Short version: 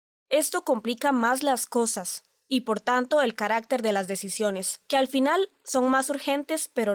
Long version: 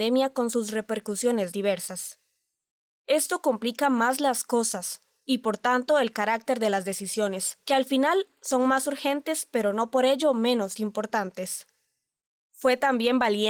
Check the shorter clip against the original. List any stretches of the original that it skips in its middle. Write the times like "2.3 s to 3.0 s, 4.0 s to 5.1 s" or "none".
none

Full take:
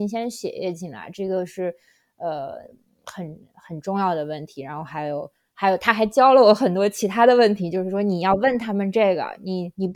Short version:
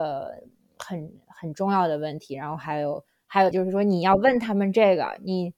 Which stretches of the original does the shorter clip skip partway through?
5.8 s to 7.7 s

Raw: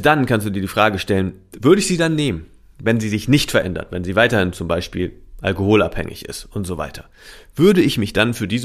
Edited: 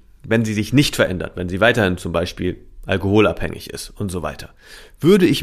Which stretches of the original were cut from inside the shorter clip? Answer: none

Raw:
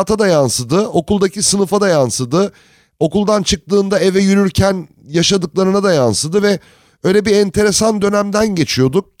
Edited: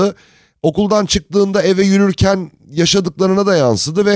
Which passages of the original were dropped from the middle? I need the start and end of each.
none

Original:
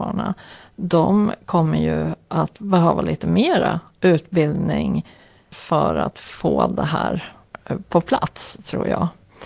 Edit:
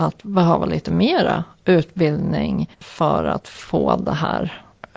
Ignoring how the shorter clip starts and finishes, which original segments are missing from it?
5.1 s to 5.4 s

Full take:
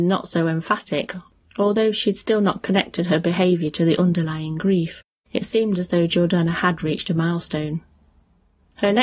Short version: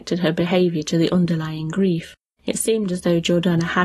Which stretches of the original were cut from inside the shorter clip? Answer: none

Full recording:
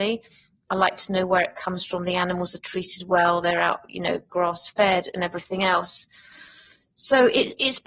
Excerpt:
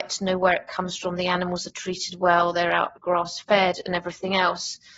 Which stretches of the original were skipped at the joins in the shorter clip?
3.9 s to 4.3 s

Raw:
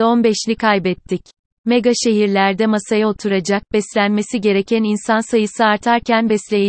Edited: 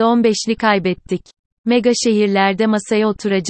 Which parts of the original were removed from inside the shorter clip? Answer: none

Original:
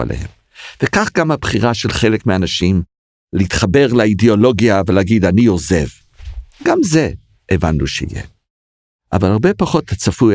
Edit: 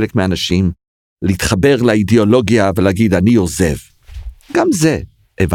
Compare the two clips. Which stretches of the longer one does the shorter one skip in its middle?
none

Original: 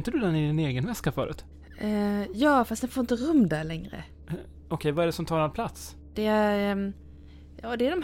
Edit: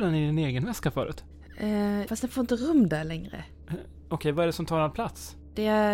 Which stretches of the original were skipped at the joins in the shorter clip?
2.3 s to 2.7 s

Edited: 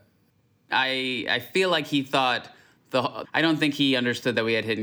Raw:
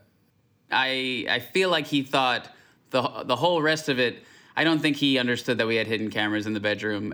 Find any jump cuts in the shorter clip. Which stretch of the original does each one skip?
3.2 s to 4.5 s

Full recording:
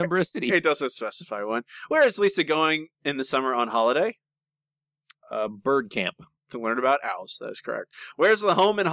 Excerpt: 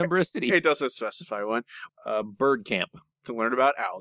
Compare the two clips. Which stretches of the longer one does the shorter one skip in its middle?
1.9 s to 5.1 s

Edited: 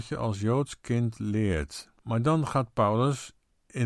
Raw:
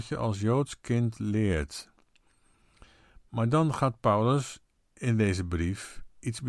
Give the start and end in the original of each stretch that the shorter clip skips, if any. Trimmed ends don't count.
2.0 s to 3.3 s

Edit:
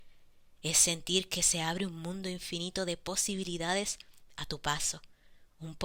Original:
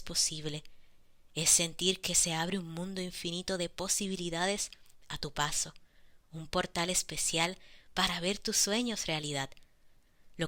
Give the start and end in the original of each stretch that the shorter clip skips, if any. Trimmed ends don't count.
none

